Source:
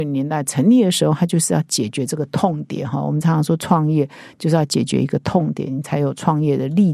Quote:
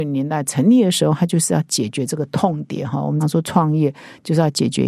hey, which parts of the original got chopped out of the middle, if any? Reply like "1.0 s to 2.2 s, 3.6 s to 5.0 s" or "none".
3.2 s to 3.3 s